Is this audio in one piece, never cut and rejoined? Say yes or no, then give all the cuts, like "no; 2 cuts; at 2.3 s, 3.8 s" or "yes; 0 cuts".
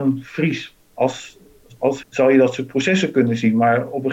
no; 1 cut; at 2.0 s